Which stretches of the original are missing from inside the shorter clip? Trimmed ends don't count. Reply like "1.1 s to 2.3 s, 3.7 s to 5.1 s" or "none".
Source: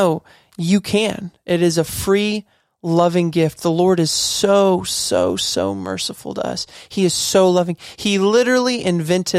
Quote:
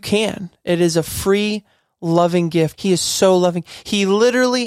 3.6 s to 6.9 s